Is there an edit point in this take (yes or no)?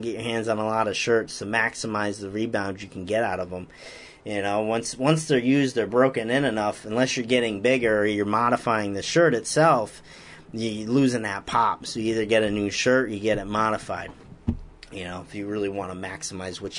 no